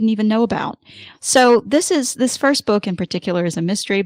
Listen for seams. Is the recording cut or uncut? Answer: uncut